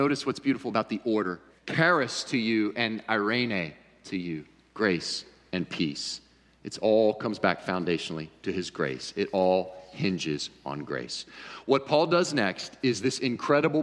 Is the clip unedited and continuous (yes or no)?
no